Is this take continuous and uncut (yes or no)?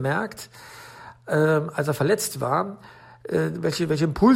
yes